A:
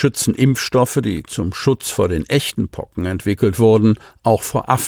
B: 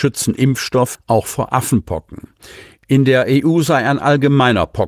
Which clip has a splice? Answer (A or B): B